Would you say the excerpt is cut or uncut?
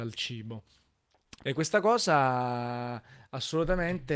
cut